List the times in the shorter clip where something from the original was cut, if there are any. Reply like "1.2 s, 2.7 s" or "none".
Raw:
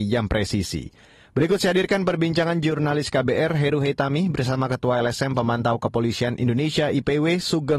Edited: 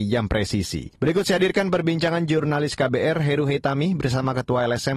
1.0 s

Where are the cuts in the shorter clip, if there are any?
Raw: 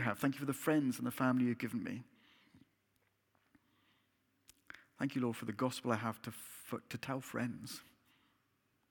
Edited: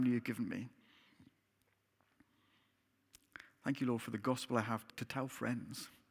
4.9 s

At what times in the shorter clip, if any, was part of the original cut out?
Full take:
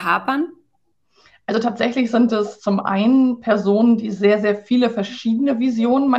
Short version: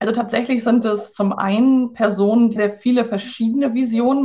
2.6 s

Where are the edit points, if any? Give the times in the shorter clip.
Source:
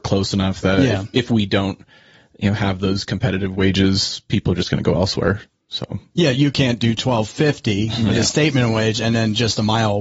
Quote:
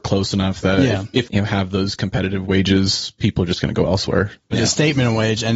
1.2 s, 4.5 s

